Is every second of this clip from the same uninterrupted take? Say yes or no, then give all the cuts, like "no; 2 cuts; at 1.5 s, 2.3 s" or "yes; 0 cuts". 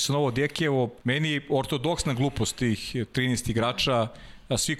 no; 1 cut; at 1.0 s